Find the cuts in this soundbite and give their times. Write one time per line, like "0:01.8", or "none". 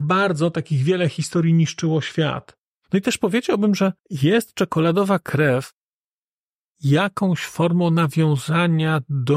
0:02.7
0:04.0